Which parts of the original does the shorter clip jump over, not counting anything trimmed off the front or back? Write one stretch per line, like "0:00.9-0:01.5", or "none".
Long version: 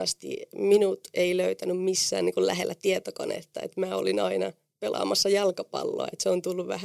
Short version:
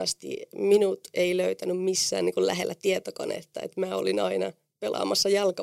none